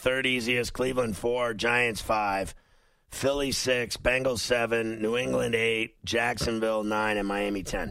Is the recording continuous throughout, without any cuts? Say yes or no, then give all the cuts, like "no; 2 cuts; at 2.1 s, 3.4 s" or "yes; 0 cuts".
yes; 0 cuts